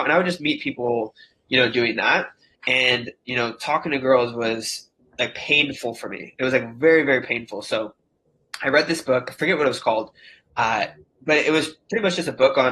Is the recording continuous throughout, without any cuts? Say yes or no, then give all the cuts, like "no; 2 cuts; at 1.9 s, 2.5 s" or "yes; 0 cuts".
no; 1 cut; at 2.5 s